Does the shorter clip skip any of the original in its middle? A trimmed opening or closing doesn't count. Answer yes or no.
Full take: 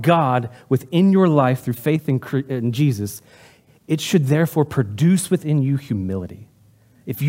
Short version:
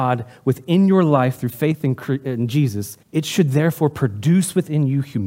yes